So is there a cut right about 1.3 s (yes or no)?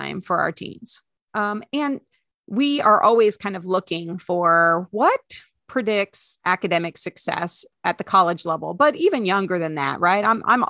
yes